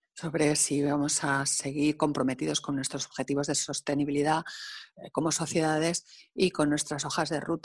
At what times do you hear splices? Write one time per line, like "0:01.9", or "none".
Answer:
none